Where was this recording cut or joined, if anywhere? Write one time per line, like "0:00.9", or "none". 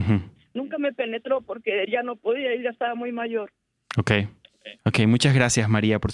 0:04.8